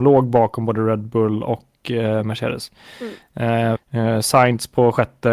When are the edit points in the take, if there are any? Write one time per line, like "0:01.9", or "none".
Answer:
0:03.8